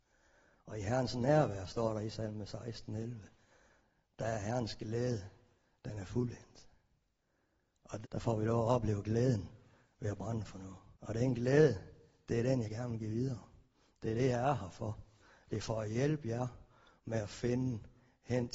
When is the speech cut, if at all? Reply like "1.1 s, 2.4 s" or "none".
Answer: 8.0 s, 10.9 s